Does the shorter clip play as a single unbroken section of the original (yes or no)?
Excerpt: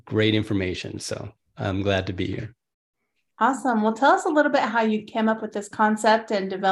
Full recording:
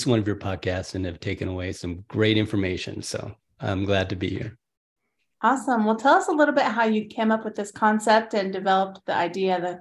yes